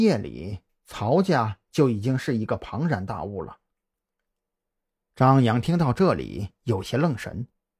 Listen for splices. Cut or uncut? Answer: uncut